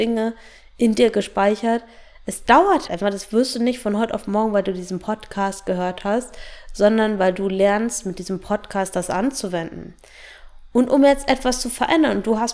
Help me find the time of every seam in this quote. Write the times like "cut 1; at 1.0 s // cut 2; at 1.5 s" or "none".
cut 1; at 2.9 s